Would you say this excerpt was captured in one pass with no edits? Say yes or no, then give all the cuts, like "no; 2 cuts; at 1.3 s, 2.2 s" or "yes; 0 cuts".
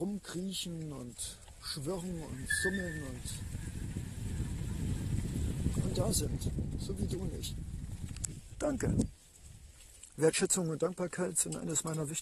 yes; 0 cuts